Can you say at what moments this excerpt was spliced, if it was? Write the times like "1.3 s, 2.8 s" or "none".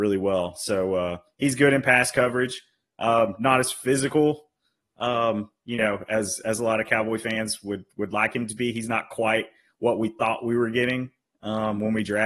none